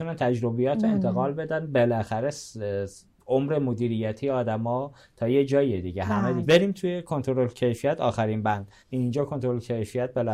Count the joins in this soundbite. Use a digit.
2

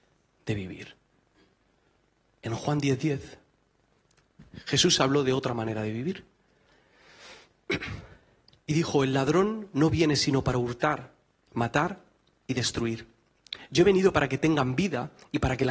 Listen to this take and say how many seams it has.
1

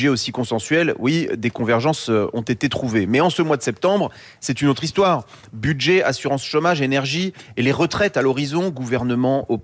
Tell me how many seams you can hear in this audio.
0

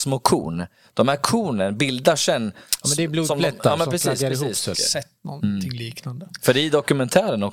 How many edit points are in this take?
1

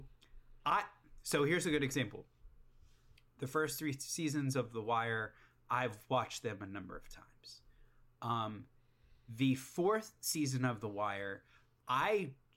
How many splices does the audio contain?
0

